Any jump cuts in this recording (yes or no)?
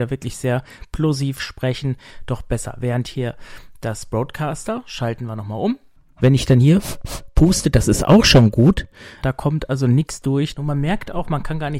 yes